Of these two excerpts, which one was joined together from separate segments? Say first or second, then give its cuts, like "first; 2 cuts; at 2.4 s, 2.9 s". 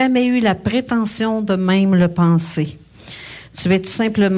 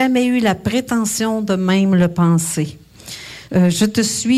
second; 1 cut; at 3.5 s